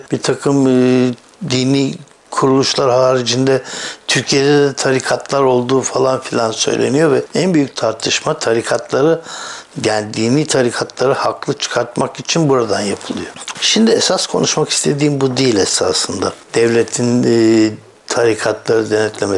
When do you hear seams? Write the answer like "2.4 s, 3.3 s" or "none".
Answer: 13.5 s